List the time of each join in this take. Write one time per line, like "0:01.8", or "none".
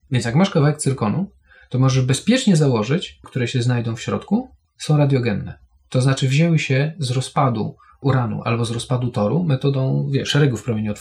0:03.2